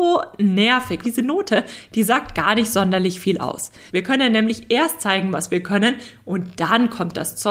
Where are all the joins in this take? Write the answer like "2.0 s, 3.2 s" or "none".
1.0 s, 3.9 s